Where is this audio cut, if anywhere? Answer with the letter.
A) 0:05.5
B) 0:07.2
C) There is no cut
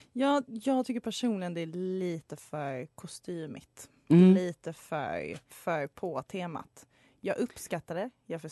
A